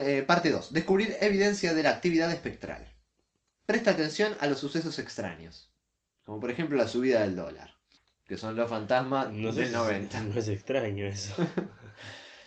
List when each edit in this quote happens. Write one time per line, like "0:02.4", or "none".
none